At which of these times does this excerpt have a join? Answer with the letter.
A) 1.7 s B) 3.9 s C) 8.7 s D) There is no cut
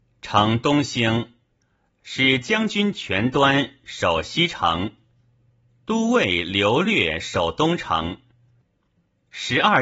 D